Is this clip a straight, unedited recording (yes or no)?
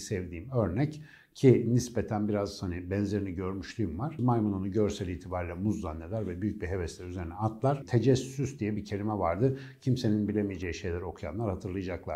no